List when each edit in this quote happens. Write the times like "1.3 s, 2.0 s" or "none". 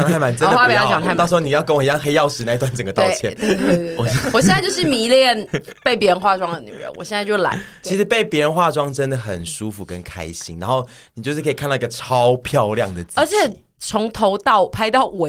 none